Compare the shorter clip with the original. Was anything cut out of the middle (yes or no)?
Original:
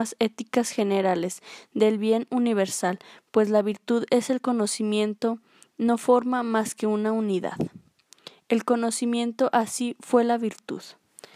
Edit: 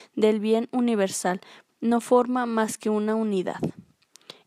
yes